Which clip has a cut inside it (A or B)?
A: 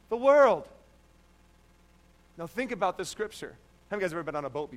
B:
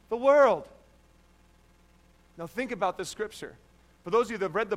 A